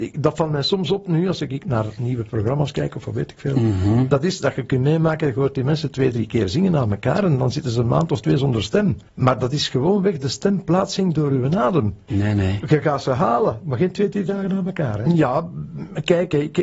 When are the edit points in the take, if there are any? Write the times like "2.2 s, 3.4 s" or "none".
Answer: 9.1 s, 12.1 s, 15.1 s